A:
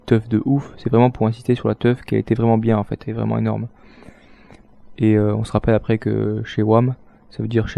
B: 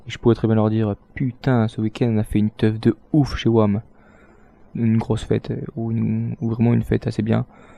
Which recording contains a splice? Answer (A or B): B